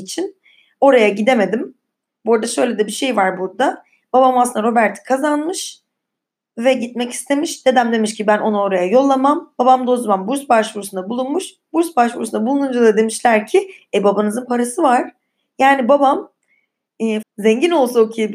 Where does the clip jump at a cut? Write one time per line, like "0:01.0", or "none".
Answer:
0:17.2